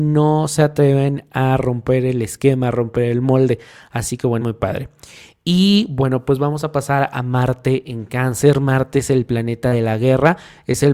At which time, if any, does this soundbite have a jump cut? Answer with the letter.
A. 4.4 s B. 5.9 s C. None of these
A